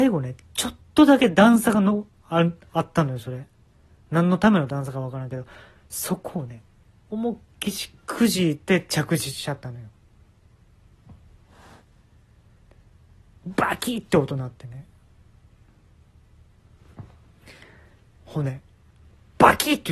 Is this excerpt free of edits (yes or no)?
no